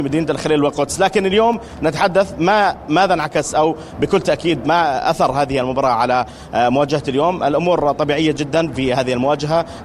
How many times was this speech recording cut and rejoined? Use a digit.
1